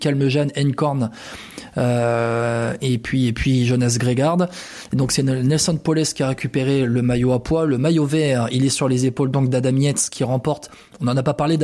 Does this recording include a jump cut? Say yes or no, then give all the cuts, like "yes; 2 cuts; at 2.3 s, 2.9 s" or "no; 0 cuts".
no; 0 cuts